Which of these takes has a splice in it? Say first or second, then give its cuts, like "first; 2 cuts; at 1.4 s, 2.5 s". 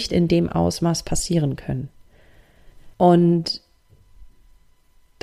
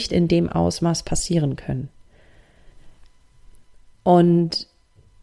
first; 1 cut; at 2.9 s